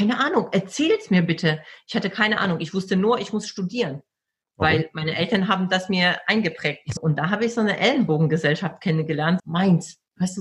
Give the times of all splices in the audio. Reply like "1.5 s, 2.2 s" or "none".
7.0 s, 9.4 s